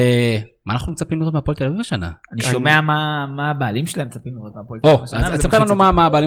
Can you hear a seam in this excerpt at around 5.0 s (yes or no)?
no